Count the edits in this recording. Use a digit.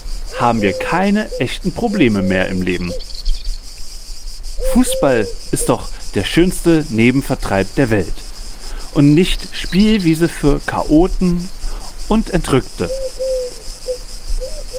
0